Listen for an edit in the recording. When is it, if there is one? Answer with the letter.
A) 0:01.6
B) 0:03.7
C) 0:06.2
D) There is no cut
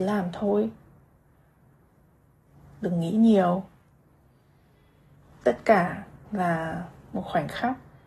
C